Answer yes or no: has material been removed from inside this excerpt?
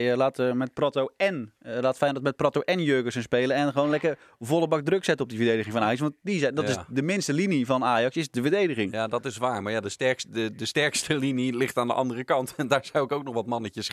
no